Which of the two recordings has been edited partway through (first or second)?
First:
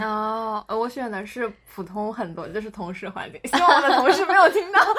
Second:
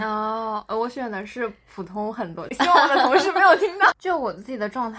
second